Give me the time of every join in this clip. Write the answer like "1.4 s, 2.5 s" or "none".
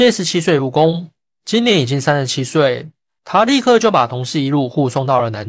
3.2 s